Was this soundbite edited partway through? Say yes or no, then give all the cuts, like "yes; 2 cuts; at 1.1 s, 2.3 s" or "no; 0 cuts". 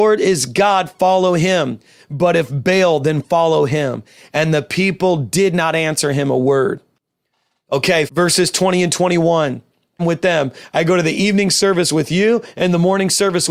yes; 2 cuts; at 8.1 s, 10.0 s